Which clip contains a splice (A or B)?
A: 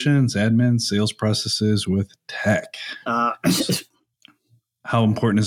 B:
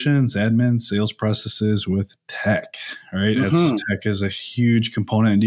A